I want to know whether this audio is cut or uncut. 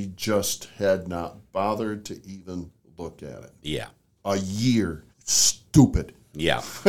cut